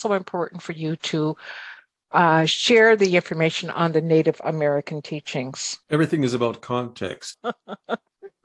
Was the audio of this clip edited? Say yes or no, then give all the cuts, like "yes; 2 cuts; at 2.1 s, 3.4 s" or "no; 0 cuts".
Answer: yes; 2 cuts; at 5.8 s, 7.3 s